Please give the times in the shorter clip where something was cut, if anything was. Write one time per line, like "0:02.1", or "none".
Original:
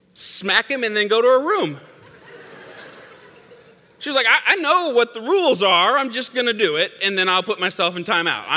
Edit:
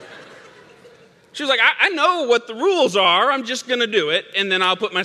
none